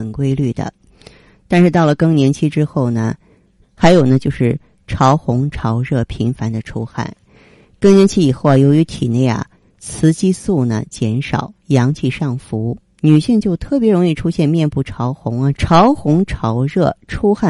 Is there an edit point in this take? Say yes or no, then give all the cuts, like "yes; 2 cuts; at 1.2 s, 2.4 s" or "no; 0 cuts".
yes; 2 cuts; at 3.6 s, 15.5 s